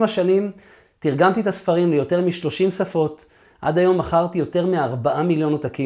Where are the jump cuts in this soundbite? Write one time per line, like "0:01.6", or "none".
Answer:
none